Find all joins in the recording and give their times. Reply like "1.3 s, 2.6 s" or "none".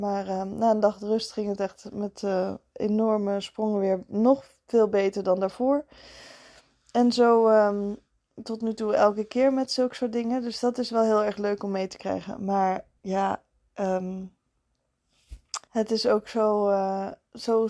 15.6 s